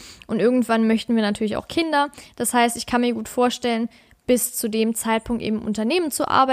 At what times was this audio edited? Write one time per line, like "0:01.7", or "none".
none